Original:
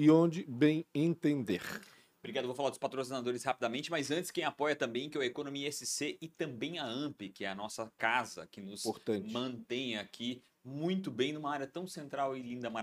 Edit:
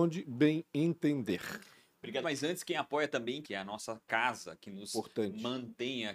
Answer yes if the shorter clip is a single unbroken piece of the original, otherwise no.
no